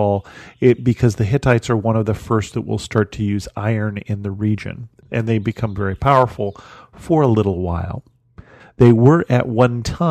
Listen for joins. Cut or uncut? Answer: cut